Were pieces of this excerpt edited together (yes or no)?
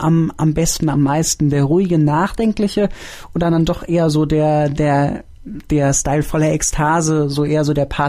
no